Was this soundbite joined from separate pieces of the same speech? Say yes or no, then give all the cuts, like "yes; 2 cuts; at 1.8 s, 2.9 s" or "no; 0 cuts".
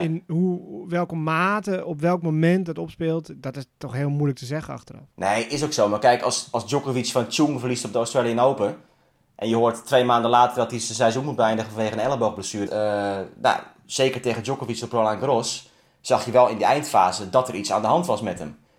yes; 2 cuts; at 5.1 s, 12.7 s